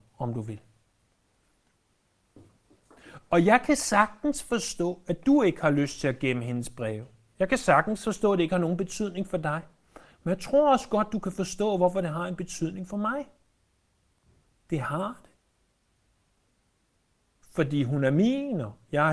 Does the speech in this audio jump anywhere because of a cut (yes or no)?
no